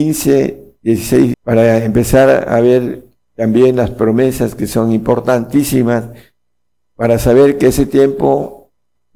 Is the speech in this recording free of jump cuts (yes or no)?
no